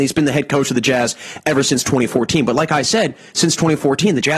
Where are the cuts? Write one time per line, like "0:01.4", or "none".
none